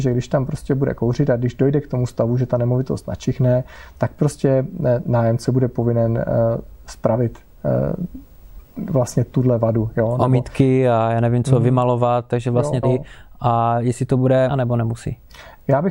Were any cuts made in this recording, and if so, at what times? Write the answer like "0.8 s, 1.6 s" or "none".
12.8 s, 14.5 s